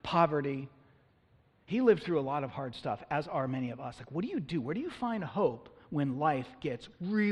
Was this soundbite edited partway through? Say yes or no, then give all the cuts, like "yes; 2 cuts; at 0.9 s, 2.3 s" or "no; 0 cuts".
no; 0 cuts